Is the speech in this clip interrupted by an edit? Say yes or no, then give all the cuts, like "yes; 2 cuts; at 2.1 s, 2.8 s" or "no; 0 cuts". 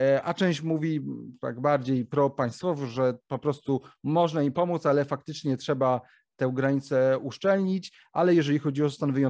no; 0 cuts